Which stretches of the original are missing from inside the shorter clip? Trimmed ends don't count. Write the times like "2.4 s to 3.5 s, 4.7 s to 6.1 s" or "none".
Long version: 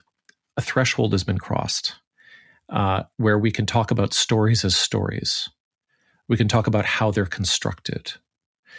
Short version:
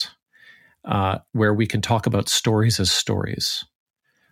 none

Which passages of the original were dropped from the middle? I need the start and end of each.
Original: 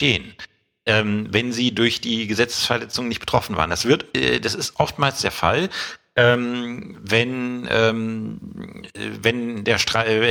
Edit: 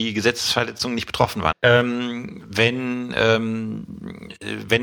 3.7 s to 6.1 s

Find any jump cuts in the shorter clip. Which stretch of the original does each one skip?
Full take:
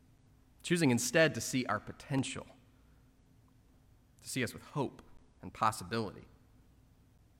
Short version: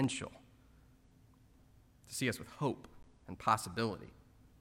none

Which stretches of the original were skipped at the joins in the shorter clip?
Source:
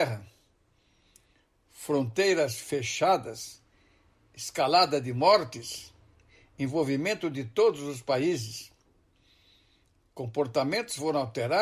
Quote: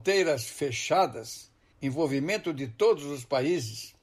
3.8 s to 6.5 s

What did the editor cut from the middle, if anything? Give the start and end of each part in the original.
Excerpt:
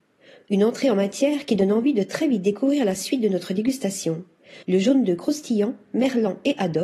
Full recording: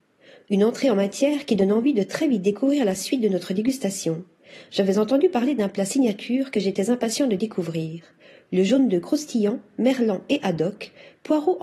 4.6 s to 8.5 s

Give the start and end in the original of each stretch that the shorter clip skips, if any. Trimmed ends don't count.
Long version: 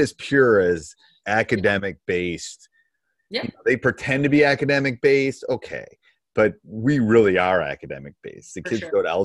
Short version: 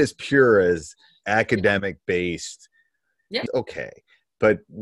3.5 s to 5.4 s

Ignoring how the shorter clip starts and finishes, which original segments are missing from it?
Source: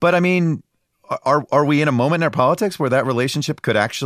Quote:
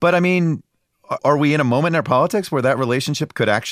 1.2 s to 1.5 s

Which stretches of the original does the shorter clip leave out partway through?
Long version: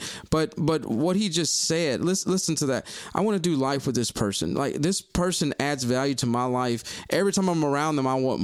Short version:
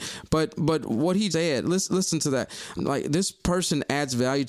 1.3 s to 1.7 s, 3.1 s to 4.5 s

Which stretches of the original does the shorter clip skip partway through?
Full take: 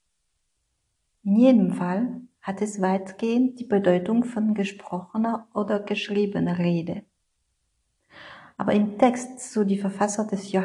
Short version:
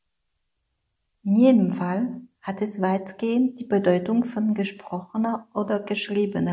none

